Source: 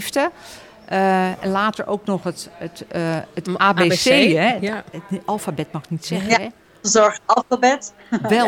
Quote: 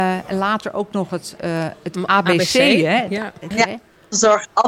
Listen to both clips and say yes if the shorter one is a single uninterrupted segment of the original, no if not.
no